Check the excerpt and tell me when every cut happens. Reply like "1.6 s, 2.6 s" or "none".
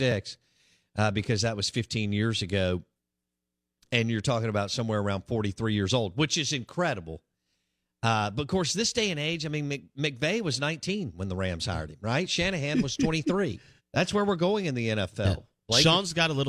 13.8 s